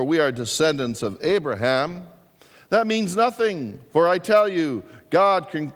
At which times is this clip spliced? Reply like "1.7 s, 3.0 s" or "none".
none